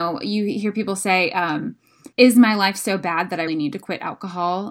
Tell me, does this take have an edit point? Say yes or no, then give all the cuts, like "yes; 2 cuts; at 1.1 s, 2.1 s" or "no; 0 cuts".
yes; 2 cuts; at 2.1 s, 3.5 s